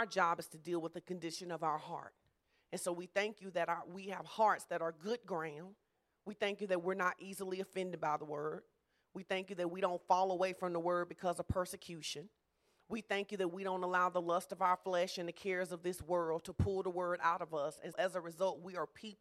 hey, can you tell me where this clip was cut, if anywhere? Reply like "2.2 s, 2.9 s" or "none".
17.9 s